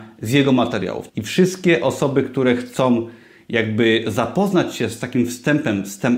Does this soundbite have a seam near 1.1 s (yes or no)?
yes